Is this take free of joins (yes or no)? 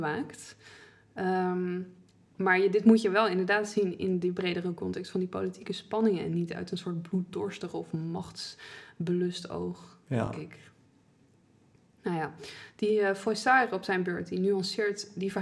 yes